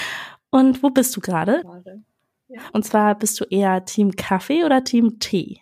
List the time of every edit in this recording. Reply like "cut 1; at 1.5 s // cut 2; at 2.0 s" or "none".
cut 1; at 1.6 s // cut 2; at 2.7 s